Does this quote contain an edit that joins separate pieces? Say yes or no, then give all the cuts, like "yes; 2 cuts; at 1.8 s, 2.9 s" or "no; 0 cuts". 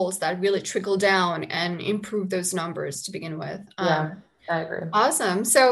no; 0 cuts